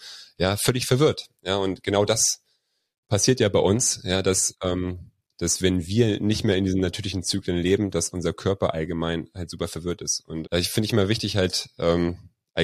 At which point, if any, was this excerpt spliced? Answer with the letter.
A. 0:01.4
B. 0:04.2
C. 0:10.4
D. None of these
C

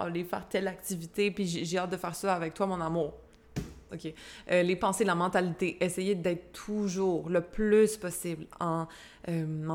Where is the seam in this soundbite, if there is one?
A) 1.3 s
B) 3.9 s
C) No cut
B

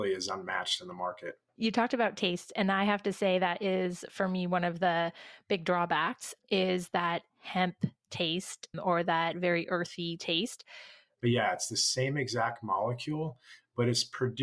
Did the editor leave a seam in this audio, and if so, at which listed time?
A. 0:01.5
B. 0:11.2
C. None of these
B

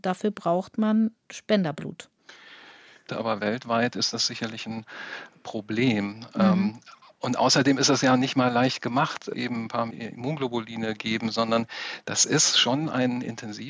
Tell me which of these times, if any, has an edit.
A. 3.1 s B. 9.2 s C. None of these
A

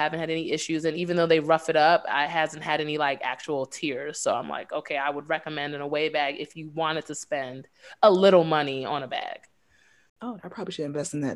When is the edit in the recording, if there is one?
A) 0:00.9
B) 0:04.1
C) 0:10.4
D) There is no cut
C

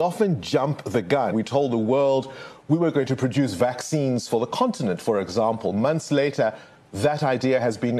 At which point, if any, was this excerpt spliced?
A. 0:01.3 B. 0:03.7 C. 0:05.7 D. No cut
A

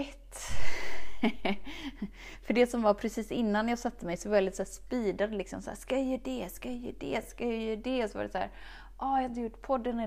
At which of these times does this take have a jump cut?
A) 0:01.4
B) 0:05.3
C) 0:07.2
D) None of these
D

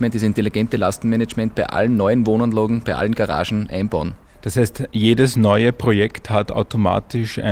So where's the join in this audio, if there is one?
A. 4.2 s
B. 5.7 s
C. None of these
C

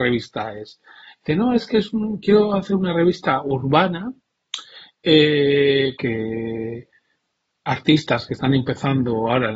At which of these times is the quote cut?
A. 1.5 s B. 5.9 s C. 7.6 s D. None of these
B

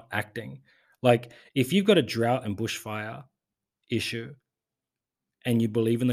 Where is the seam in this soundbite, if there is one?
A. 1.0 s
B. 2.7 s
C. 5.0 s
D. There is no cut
D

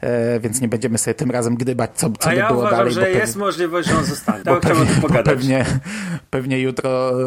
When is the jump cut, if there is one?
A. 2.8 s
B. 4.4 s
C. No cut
B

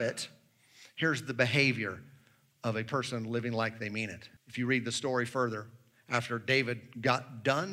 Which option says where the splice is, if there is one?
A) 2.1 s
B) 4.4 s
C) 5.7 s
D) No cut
B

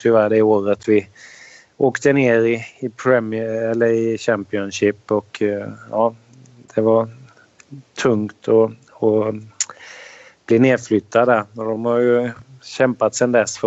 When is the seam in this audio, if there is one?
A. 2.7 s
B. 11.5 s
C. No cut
C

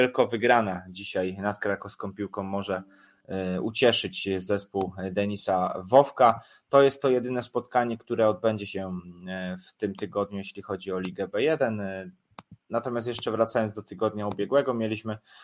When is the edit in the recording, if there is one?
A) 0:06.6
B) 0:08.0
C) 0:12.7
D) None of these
D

